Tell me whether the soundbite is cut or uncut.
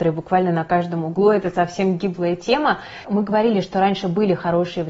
cut